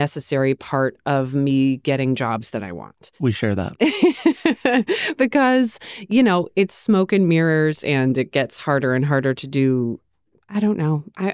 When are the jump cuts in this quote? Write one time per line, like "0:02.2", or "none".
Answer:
none